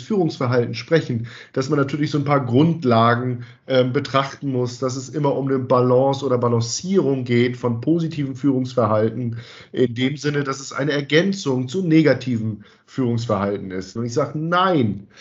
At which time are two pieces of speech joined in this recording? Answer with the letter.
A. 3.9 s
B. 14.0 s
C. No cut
B